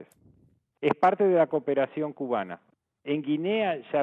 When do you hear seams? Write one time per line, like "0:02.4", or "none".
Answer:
0:03.0

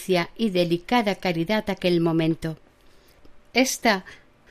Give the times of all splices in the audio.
none

